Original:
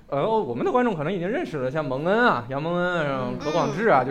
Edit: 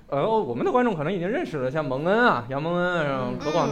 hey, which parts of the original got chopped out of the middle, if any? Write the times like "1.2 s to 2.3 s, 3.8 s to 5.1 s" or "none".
none